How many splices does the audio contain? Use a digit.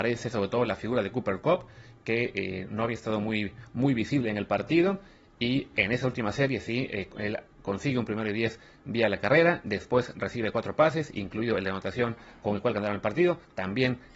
0